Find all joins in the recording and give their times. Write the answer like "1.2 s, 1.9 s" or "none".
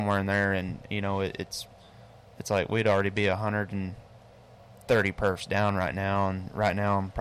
none